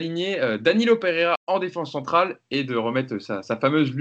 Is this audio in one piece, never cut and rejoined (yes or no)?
yes